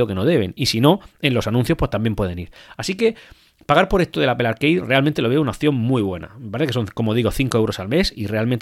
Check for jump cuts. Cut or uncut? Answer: uncut